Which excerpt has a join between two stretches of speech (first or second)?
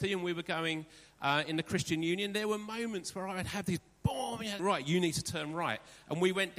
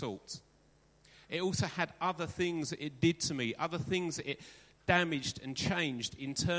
first